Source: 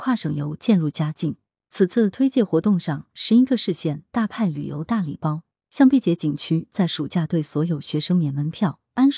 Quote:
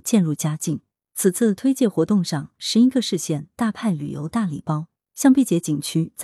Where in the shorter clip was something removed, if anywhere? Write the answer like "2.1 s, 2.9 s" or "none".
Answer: none